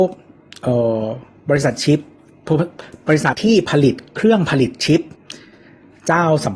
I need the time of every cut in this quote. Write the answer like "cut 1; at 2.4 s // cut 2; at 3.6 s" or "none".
cut 1; at 3.3 s